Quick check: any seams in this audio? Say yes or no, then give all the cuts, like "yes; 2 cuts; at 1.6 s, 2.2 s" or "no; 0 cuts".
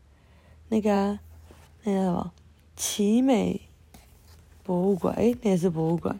no; 0 cuts